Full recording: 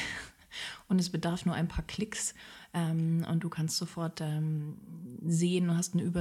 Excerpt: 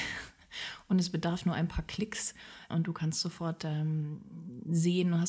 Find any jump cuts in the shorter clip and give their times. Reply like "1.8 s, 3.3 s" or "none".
2.7 s